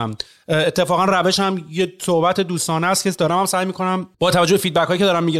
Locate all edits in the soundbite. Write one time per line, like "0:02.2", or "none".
0:04.1